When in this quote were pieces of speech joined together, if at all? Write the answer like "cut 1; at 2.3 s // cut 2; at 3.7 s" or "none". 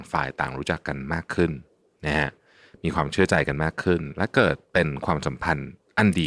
none